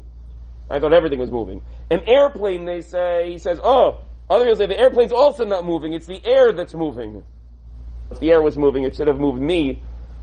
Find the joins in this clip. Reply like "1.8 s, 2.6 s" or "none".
8.1 s